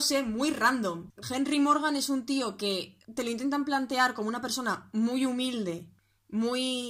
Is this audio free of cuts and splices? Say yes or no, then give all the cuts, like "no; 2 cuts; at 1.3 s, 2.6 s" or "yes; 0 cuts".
no; 2 cuts; at 1.2 s, 3.0 s